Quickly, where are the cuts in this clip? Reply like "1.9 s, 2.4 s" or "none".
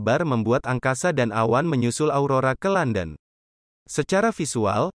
3.7 s